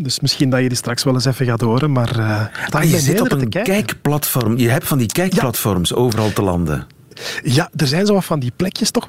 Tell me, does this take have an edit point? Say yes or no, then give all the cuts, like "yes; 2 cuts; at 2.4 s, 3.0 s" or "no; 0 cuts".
no; 0 cuts